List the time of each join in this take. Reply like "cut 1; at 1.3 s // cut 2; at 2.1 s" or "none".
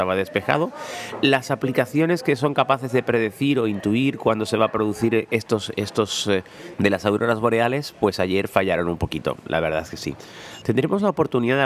cut 1; at 6.7 s // cut 2; at 10.6 s